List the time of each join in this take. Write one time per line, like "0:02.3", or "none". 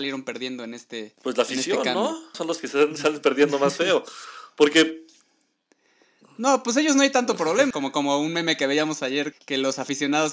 0:02.3
0:07.7
0:09.3